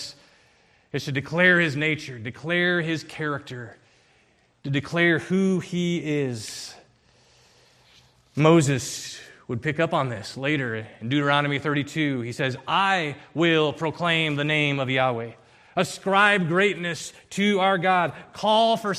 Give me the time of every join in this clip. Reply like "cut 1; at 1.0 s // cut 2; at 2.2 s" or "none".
none